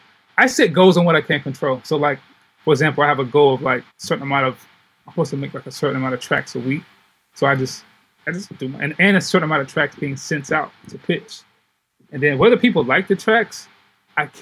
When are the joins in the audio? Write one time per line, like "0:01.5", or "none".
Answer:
0:03.9